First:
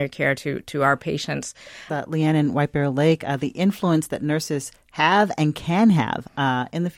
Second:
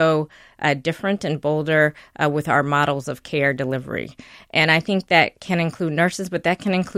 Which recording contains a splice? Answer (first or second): first